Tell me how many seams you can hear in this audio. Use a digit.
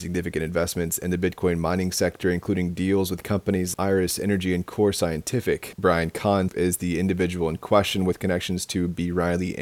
2